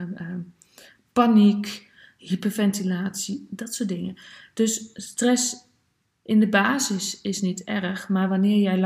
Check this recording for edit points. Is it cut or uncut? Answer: uncut